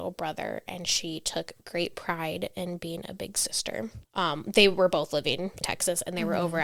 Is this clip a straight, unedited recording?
no; 2 cuts; at 4.0 s, 5.6 s

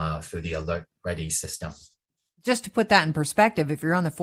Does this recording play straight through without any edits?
yes; 0 cuts

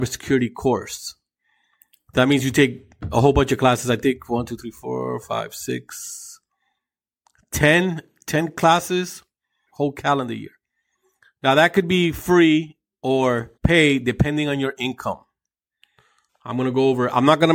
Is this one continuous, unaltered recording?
no; 3 cuts; at 9.7 s, 13.6 s, 16.3 s

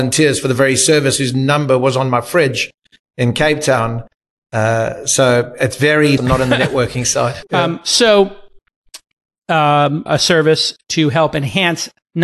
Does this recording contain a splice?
yes; 3 cuts; at 6.2 s, 7.4 s, 10.1 s

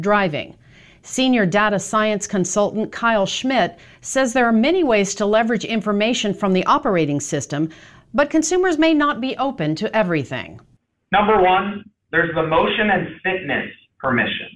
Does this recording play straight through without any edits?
yes; 0 cuts

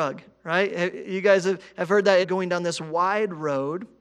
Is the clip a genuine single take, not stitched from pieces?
no; 1 cut; at 2.2 s

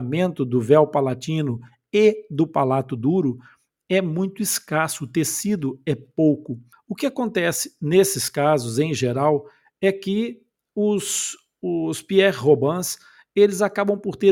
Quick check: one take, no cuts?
no; 1 cut; at 6.7 s

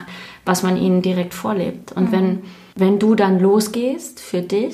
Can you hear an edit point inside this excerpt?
no; 0 cuts

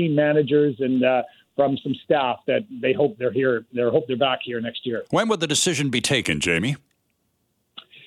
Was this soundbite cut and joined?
no; 0 cuts

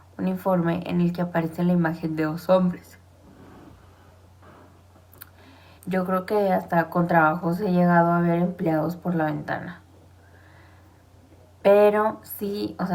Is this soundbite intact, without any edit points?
no; 1 cut; at 5.8 s

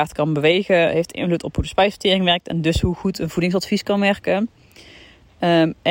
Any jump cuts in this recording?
no; 0 cuts

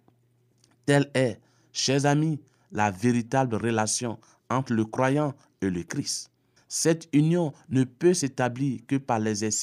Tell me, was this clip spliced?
yes; 1 cut; at 6.6 s

